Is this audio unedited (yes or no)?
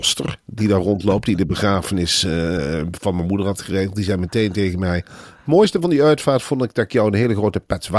yes